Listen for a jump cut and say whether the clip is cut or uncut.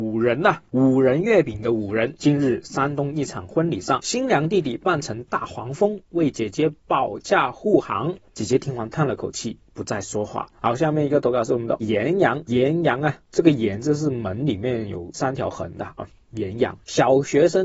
cut